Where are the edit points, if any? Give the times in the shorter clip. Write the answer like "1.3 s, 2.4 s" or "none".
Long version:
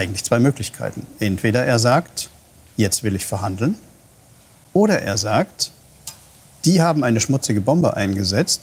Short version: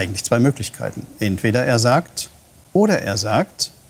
2.6 s